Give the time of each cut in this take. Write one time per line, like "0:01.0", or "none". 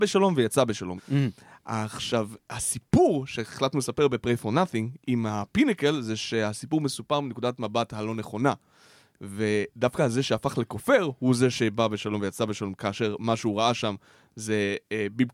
0:01.0